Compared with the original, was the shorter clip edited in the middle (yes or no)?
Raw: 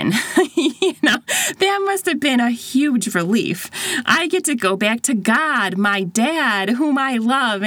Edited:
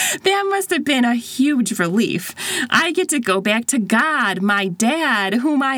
no